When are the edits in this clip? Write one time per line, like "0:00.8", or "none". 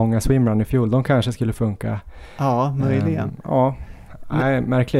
none